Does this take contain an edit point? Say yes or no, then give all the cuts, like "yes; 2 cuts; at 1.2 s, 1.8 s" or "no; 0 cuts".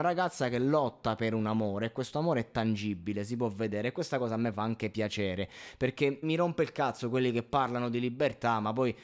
yes; 1 cut; at 6.2 s